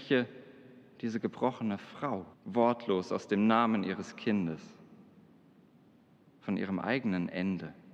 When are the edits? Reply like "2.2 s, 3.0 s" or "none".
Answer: 2.3 s